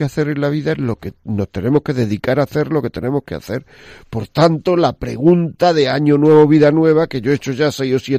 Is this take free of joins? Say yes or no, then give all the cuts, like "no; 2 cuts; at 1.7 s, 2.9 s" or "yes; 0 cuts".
yes; 0 cuts